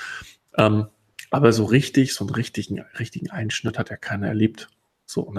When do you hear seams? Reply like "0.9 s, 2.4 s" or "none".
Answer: none